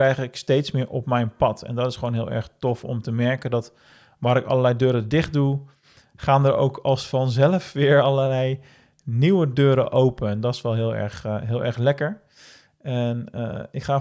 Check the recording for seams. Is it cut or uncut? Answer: uncut